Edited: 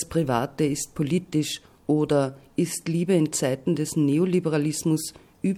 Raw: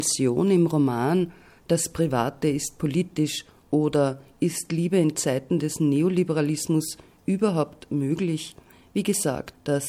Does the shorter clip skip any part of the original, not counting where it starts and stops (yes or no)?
no